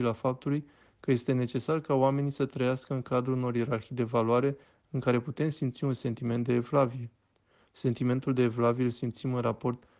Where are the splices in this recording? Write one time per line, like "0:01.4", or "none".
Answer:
none